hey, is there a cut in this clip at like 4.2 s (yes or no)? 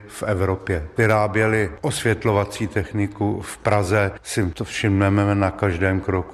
no